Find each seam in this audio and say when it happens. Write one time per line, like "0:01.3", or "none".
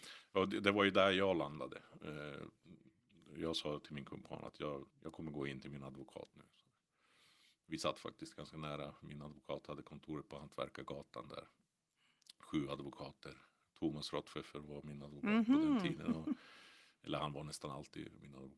0:04.9